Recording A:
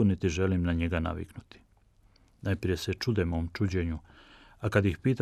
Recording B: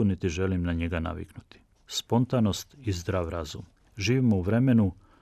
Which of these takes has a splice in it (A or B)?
B